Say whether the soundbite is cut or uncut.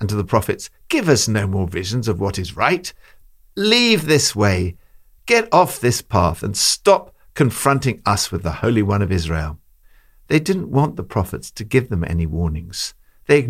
uncut